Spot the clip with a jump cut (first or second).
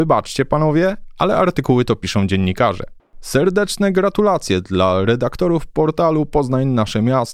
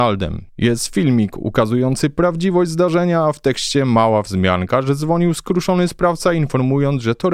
first